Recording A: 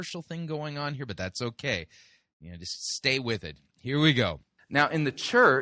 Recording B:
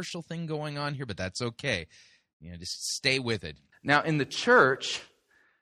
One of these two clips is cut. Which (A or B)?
B